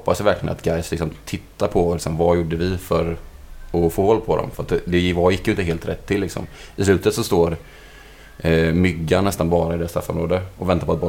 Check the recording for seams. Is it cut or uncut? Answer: uncut